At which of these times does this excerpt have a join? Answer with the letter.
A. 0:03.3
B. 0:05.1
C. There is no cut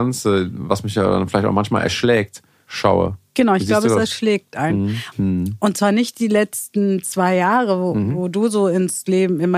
B